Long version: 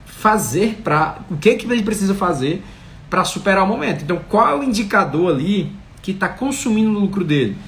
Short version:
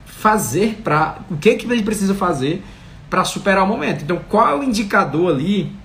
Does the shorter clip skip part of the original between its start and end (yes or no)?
no